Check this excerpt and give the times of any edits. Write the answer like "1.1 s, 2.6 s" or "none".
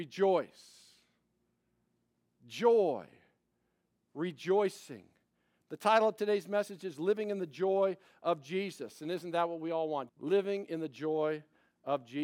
10.1 s

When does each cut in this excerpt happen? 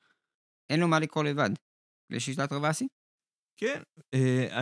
none

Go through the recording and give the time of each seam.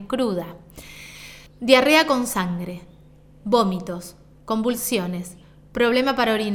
1.5 s

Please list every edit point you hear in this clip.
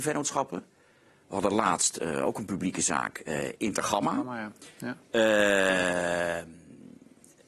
none

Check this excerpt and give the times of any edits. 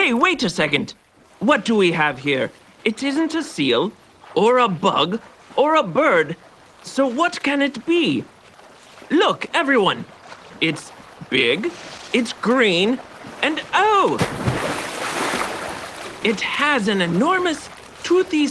none

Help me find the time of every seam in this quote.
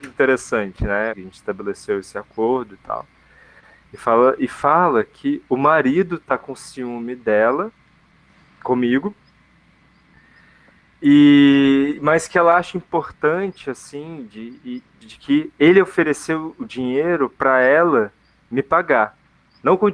1.1 s, 15.0 s

